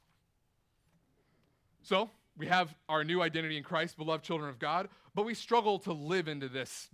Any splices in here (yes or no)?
no